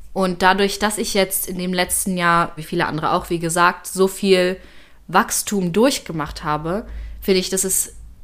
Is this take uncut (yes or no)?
no